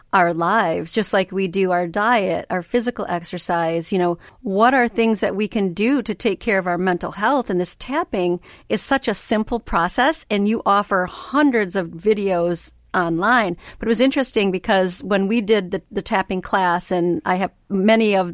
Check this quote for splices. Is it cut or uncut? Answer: uncut